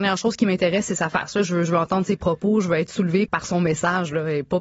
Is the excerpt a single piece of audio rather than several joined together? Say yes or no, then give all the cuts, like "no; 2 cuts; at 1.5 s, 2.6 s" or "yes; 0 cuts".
no; 1 cut; at 3.3 s